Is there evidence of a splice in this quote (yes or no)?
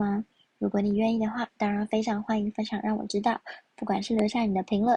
no